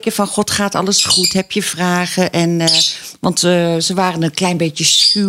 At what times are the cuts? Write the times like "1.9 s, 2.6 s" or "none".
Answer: none